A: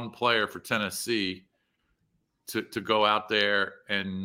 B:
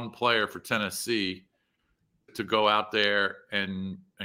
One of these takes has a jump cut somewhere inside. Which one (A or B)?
B